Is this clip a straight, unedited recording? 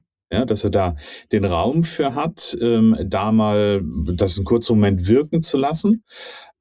yes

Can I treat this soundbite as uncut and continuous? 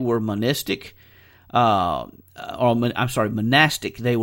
yes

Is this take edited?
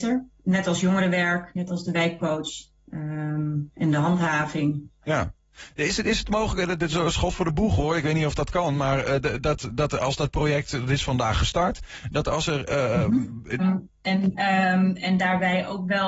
yes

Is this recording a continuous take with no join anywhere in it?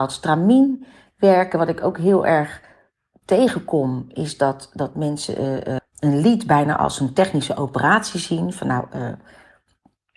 no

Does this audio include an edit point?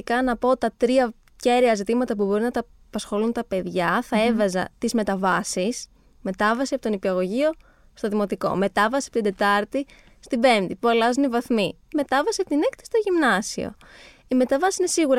no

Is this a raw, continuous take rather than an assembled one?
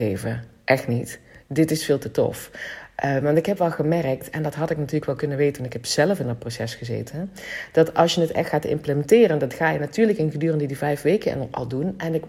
yes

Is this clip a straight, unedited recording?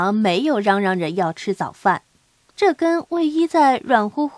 no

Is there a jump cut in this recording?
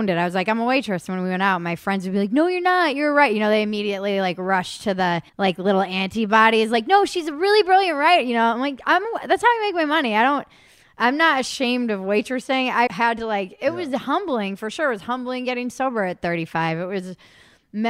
yes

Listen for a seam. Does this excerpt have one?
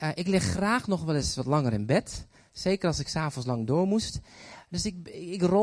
no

